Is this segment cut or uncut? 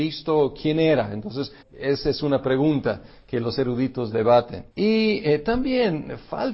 cut